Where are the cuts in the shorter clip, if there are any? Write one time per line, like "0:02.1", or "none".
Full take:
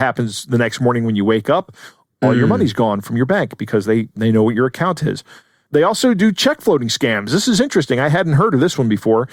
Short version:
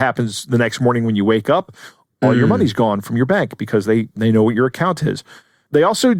none